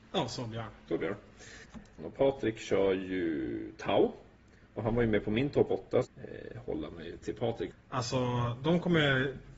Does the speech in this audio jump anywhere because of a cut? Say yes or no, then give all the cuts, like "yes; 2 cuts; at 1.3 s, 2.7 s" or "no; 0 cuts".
yes; 3 cuts; at 2.0 s, 6.0 s, 7.7 s